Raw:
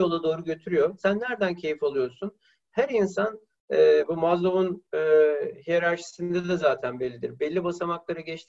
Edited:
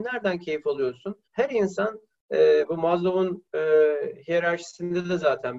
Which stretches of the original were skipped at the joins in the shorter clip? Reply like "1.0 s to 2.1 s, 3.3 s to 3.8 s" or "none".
2.4 s to 2.6 s

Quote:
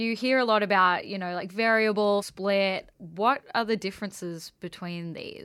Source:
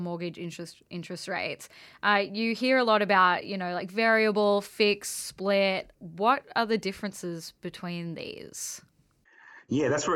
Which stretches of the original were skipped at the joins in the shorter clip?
4.6 s to 5.2 s

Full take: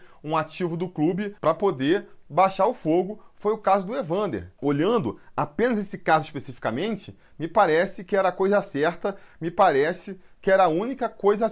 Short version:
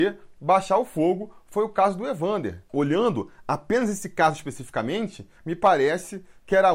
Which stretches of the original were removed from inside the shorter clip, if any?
7.2 s to 9.3 s

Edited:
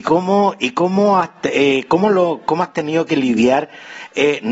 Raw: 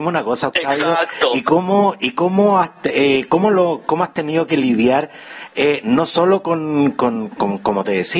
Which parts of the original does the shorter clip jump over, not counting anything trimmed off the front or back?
none

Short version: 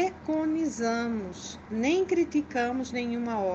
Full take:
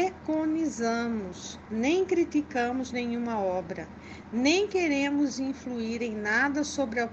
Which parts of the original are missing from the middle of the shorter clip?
none

